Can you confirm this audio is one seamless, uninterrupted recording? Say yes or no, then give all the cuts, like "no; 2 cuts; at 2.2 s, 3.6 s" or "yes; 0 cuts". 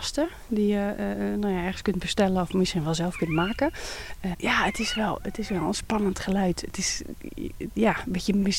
no; 1 cut; at 4.3 s